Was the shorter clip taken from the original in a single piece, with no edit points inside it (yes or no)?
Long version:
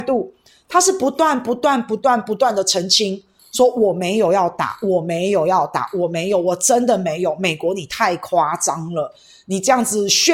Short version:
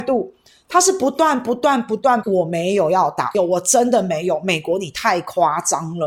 no